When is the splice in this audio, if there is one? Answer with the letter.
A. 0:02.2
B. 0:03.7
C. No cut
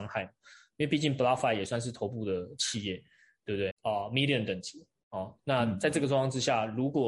B